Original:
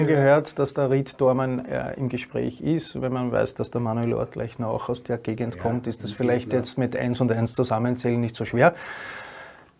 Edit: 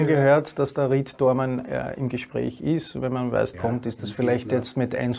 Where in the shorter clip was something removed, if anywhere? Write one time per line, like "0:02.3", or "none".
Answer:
0:03.5

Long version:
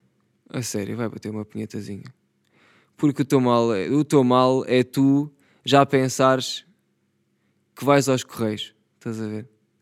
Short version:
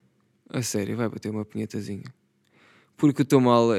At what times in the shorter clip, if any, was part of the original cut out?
none

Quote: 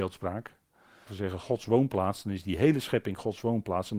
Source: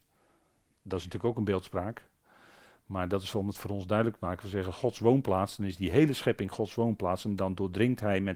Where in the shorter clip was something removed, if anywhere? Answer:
0:01.1

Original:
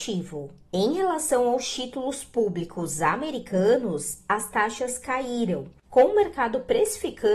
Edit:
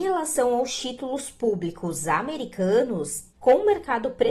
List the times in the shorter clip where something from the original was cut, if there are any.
0:03.3

